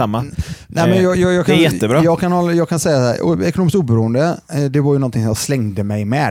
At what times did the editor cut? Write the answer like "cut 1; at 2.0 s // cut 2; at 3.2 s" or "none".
none